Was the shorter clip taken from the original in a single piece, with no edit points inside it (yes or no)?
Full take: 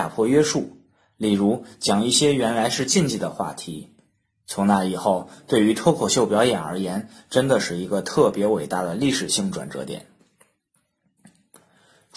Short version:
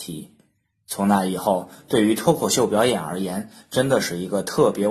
yes